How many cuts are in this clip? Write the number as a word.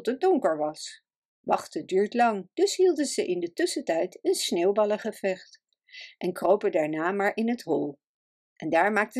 zero